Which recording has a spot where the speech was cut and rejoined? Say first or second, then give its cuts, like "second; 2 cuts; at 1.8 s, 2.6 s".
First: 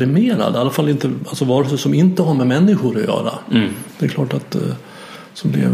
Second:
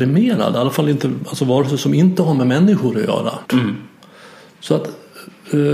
second; 1 cut; at 3.5 s